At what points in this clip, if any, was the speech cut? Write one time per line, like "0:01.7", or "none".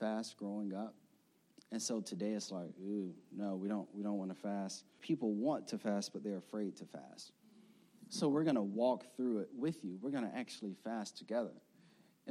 0:05.0